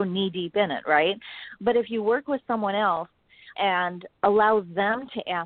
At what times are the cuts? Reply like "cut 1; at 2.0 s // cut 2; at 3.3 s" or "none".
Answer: cut 1; at 3.5 s